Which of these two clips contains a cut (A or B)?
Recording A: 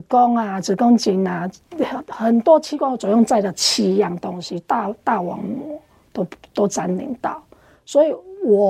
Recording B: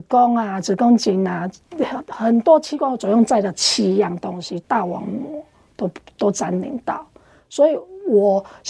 B